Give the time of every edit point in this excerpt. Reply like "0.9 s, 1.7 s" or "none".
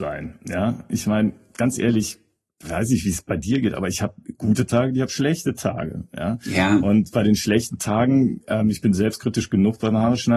none